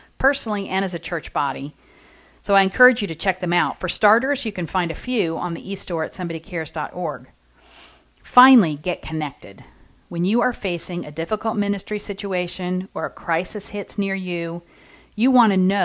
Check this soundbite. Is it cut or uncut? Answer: uncut